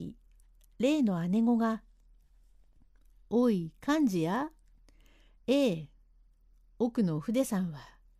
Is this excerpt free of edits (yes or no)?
yes